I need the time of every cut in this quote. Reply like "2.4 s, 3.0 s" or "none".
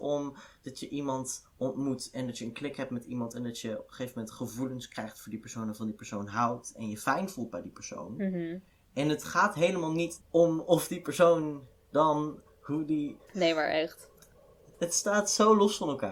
10.2 s, 13.3 s